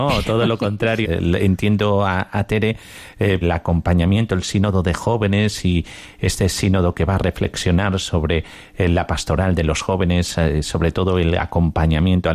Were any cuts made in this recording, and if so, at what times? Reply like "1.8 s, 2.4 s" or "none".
1.0 s, 3.4 s